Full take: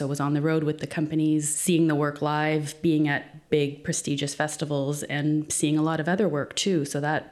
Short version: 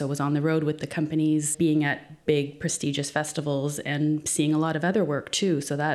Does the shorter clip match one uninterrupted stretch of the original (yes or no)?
no